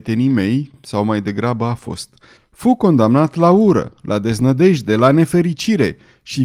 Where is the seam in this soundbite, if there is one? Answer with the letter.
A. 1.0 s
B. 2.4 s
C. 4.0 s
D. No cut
B